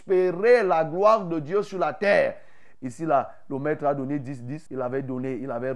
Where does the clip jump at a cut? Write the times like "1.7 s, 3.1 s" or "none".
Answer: 2.7 s, 4.7 s